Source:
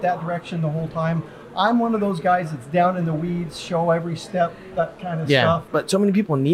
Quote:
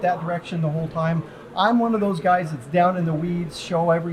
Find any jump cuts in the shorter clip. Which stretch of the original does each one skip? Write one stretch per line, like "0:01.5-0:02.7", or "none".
none